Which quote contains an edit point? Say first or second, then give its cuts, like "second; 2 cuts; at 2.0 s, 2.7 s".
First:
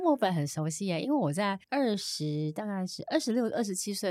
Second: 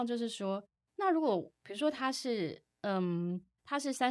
first; 1 cut; at 1.6 s